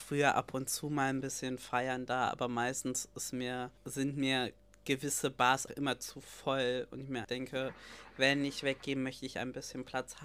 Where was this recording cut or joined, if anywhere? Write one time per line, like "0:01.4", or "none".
0:03.8
0:05.7
0:07.2